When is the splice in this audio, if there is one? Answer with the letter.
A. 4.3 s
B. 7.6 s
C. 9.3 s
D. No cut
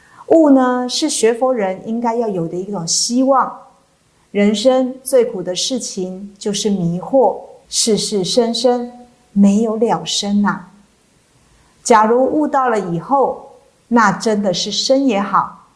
B